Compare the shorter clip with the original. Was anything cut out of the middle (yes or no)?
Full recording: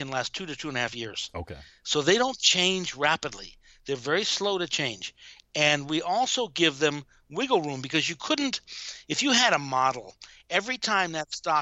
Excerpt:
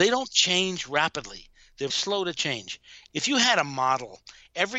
yes